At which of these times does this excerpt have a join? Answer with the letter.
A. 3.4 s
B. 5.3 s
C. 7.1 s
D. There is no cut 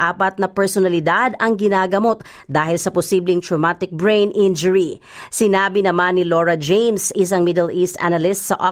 D